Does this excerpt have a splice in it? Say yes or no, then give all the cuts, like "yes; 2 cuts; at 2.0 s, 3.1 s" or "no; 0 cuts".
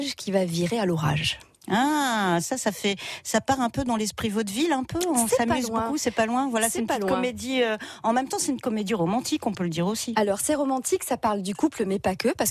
no; 0 cuts